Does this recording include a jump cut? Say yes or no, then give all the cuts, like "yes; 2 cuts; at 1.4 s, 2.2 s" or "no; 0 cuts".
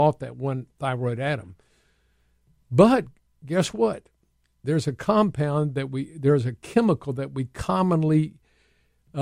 no; 0 cuts